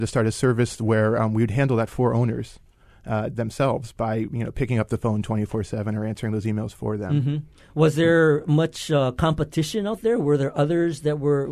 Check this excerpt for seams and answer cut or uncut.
uncut